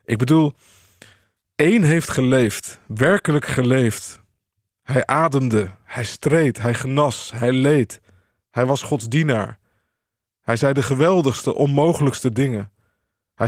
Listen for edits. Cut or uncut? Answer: uncut